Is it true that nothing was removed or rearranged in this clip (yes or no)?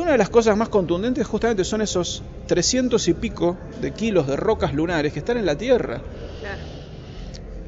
yes